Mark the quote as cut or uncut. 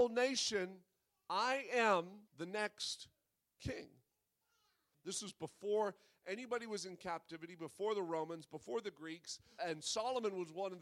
cut